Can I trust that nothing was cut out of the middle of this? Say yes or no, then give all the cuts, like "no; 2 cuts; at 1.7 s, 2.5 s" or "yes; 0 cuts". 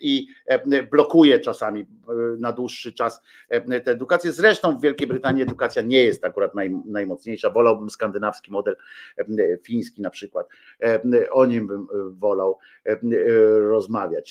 yes; 0 cuts